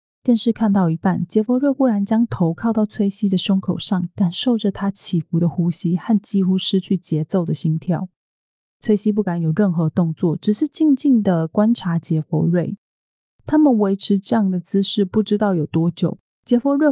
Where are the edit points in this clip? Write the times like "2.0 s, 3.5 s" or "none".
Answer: none